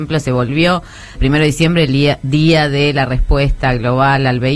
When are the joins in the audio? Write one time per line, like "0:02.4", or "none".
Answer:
0:01.2